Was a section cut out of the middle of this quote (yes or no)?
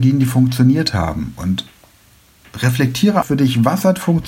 yes